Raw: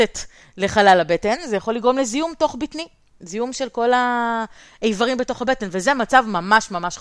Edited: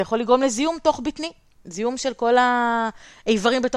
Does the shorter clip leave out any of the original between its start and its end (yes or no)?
no